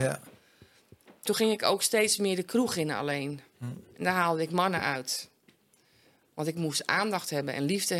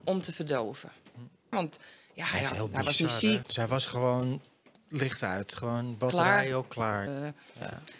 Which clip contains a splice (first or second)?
second